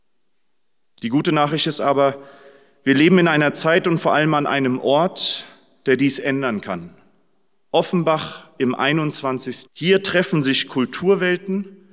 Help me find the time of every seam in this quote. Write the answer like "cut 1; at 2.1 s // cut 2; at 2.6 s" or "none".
cut 1; at 9.7 s